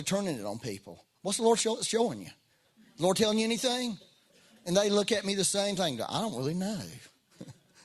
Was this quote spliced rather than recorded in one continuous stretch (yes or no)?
no